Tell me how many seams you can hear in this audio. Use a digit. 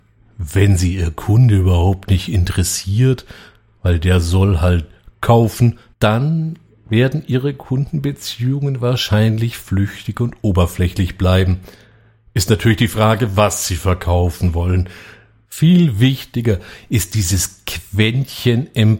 2